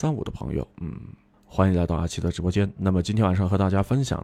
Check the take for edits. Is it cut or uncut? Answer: cut